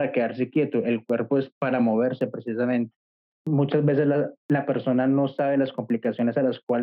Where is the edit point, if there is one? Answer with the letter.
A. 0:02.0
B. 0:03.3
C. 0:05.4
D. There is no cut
B